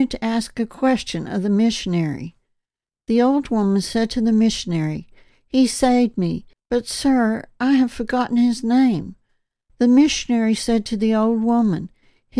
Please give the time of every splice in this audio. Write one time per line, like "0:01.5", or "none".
0:06.5